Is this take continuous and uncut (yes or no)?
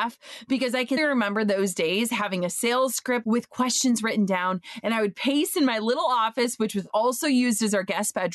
no